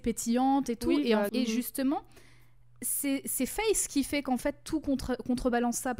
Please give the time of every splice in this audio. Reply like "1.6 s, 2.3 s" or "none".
1.3 s